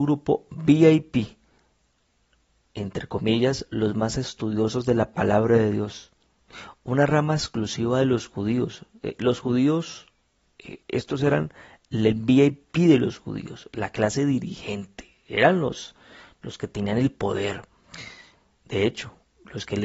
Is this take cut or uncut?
uncut